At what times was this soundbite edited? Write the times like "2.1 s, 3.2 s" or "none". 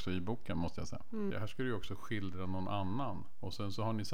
1.3 s